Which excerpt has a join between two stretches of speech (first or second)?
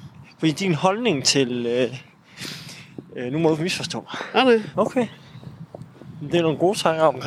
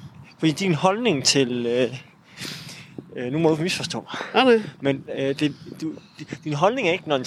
first